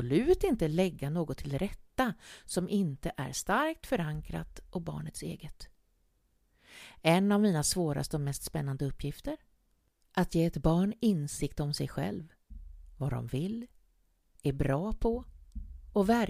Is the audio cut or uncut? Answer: uncut